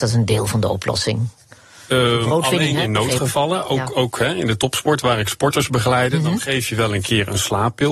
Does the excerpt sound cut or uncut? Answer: uncut